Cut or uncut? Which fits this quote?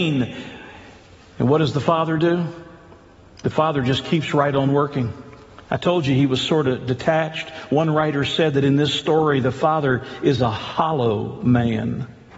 uncut